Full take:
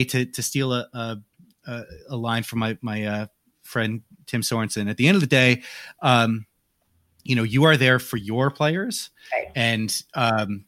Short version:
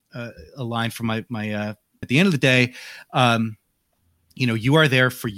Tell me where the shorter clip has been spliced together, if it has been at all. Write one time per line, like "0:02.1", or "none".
0:02.0